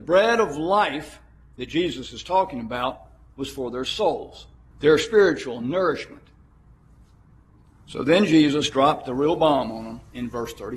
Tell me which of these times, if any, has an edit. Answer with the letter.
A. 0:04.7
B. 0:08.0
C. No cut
A